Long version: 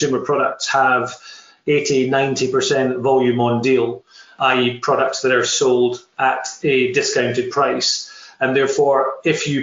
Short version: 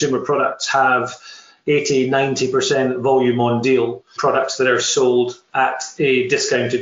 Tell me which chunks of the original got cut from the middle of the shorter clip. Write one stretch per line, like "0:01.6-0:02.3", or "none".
0:04.2-0:04.8